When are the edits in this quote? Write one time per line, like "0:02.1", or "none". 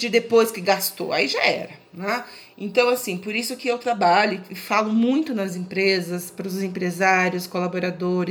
none